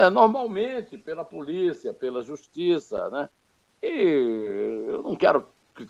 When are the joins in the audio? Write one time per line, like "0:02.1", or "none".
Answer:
none